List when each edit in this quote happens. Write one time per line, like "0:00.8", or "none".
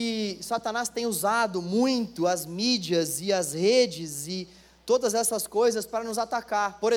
none